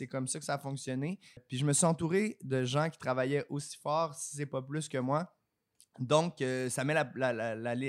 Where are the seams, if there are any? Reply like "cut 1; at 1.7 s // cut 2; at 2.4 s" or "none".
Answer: cut 1; at 1.4 s